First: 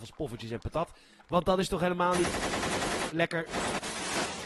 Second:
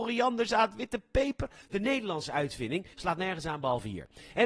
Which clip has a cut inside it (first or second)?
second